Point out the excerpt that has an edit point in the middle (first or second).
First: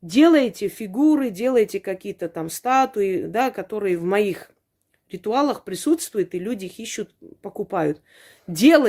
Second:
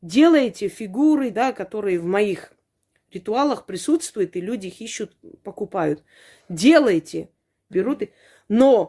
second